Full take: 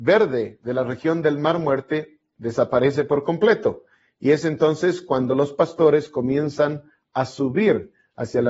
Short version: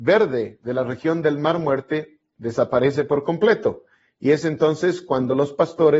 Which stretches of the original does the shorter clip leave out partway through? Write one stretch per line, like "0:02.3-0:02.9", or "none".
none